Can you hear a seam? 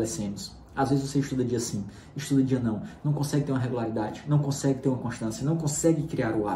no; 0 cuts

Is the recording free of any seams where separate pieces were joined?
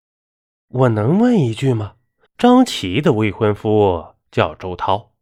no; 1 cut; at 2.3 s

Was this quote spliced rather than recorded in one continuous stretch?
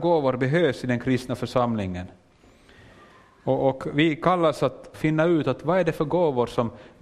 yes; 1 cut; at 4.9 s

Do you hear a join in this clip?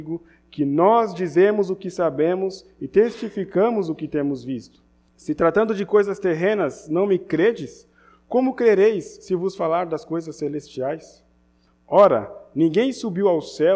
yes; 1 cut; at 5.1 s

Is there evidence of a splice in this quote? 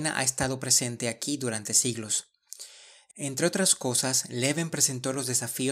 no; 0 cuts

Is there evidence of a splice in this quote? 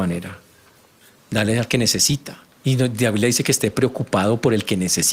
yes; 2 cuts; at 1.2 s, 2.5 s

